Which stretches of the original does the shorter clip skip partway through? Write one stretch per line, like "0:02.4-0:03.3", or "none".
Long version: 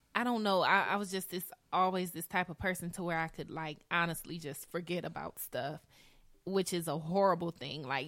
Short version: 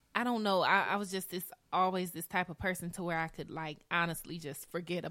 none